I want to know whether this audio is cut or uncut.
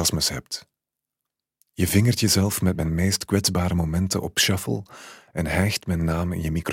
uncut